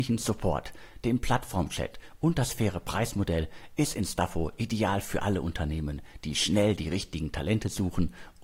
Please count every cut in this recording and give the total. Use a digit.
0